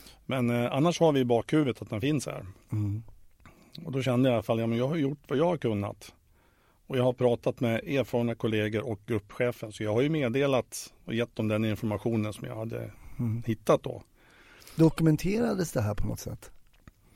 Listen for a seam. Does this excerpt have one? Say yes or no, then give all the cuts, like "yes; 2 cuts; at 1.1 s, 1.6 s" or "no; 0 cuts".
no; 0 cuts